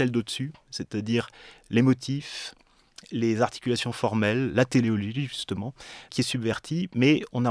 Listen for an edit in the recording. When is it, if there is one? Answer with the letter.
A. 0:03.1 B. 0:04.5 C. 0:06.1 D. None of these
C